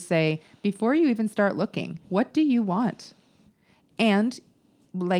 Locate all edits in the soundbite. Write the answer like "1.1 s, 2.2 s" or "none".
2.0 s